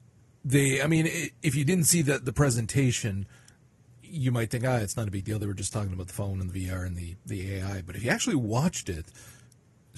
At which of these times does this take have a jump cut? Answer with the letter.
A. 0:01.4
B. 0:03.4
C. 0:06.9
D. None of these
D